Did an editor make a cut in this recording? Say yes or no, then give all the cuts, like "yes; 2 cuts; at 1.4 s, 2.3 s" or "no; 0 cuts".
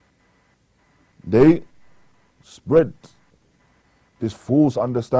yes; 1 cut; at 1.1 s